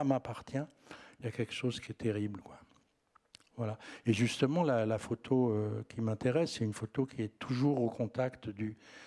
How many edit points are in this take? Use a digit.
0